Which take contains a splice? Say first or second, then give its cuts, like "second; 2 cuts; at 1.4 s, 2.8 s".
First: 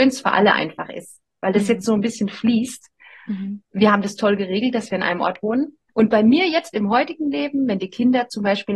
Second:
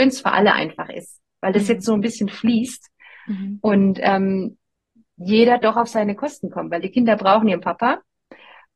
first; 2 cuts; at 3.6 s, 5.9 s